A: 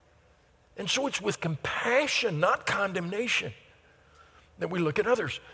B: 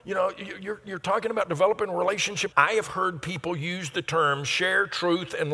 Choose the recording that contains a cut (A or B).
B